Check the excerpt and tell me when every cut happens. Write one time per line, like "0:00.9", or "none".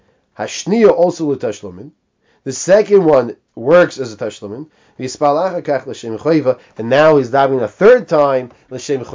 none